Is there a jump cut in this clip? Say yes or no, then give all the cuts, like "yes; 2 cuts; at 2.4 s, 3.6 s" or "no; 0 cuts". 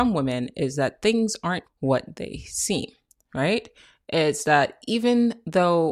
yes; 1 cut; at 1.7 s